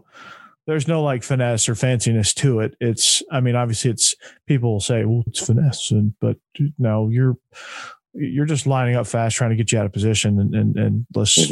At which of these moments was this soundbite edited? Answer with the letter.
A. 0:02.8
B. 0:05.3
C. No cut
B